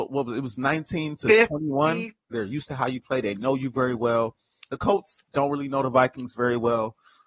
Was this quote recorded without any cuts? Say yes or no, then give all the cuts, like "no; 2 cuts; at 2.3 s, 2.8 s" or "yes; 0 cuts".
no; 1 cut; at 2.3 s